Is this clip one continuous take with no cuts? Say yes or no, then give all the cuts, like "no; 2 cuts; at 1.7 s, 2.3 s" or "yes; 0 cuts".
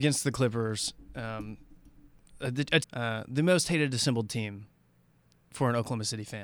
no; 1 cut; at 2.8 s